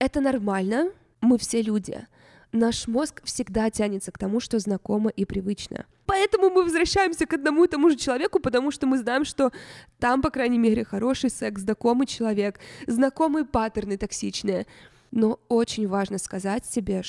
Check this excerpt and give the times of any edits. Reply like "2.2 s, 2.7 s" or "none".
none